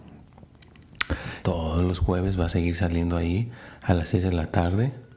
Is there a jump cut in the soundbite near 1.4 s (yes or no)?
yes